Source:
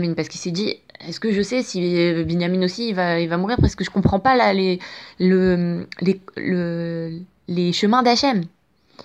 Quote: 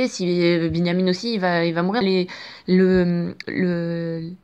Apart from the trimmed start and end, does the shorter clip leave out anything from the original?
yes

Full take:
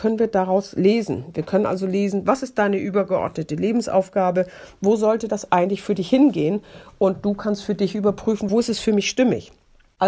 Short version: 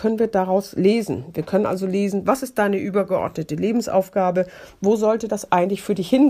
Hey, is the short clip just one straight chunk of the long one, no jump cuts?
yes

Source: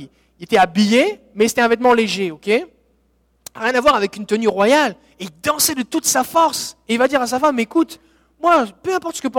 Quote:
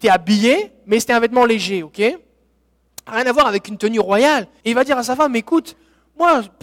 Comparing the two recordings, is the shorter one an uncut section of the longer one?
no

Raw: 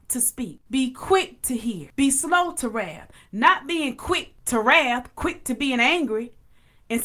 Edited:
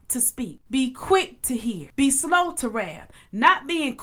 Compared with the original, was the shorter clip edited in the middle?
no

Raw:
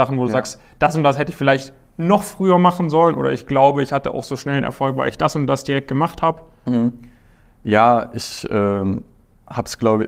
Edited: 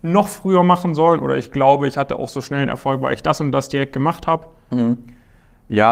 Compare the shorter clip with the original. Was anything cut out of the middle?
no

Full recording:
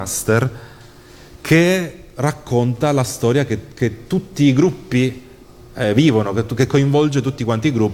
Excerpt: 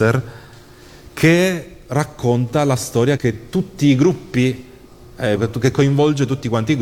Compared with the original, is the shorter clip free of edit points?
no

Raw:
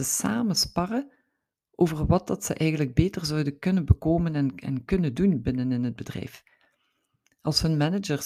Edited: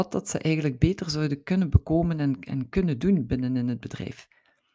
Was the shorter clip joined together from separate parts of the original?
no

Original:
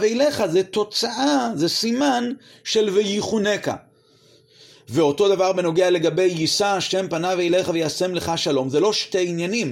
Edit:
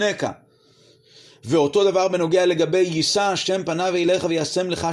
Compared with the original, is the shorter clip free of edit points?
yes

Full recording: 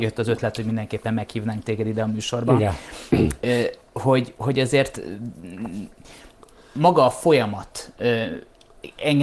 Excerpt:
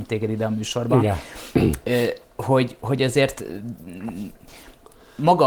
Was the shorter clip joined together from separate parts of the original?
no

